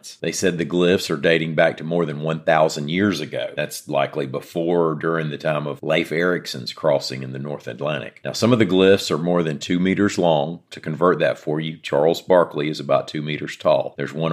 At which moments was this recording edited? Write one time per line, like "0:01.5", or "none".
0:03.6